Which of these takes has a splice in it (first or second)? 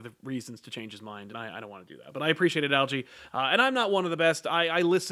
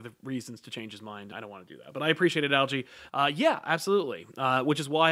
second